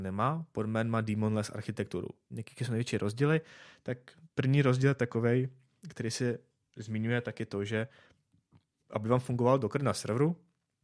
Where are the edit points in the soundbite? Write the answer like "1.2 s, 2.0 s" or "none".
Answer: 2.3 s